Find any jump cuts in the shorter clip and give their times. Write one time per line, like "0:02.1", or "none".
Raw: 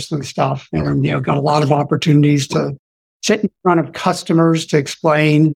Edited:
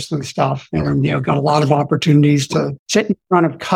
0:02.8